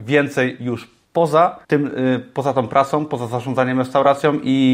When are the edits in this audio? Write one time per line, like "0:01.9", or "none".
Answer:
0:01.6